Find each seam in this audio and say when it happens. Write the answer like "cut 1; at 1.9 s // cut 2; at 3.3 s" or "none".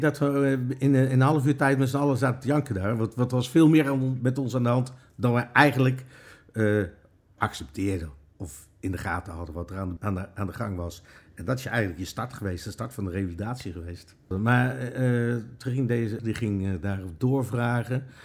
cut 1; at 10.0 s // cut 2; at 14.3 s // cut 3; at 16.2 s